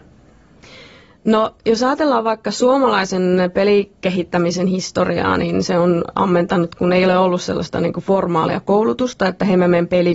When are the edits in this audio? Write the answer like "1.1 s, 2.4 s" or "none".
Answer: none